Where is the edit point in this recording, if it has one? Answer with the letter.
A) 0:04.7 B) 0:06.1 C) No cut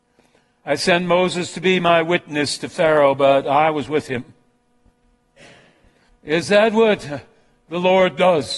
B